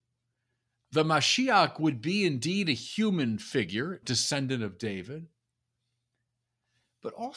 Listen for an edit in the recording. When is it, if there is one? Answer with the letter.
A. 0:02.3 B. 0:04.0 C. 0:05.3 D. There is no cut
B